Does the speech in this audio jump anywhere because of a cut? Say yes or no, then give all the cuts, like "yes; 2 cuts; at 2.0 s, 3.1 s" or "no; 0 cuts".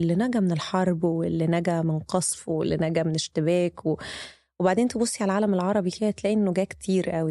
no; 0 cuts